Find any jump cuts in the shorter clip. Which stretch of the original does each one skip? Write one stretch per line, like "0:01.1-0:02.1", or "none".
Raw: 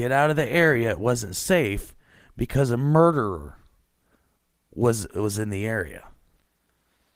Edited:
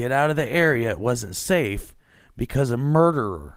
none